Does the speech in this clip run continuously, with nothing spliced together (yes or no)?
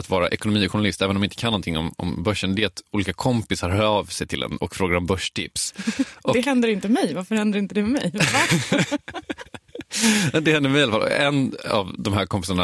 yes